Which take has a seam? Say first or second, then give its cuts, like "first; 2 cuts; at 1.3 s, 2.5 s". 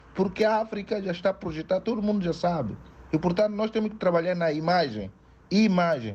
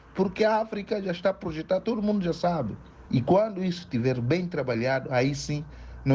second; 1 cut; at 3.1 s